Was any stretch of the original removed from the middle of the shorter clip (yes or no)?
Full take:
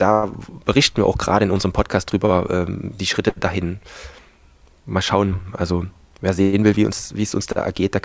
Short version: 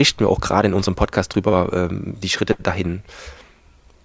no